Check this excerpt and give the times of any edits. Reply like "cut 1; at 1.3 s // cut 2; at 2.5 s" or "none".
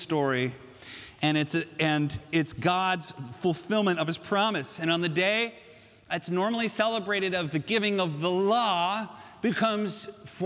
none